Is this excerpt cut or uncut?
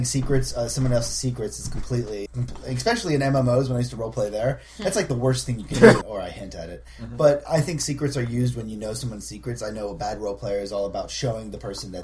cut